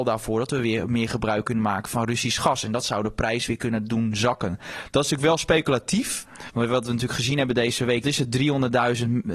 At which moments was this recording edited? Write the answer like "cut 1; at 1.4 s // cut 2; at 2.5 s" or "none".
cut 1; at 6.5 s // cut 2; at 8.0 s